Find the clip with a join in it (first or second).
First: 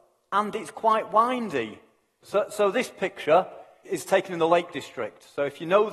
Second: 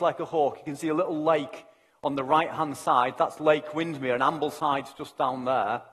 first